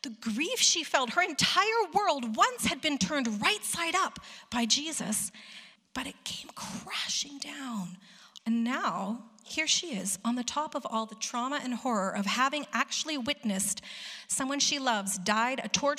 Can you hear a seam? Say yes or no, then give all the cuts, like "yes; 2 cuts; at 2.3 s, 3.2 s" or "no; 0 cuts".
yes; 2 cuts; at 5.8 s, 8.4 s